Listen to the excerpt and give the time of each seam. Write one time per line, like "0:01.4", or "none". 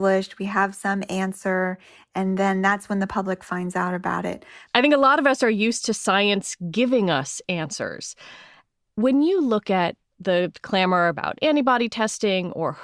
0:04.7
0:08.7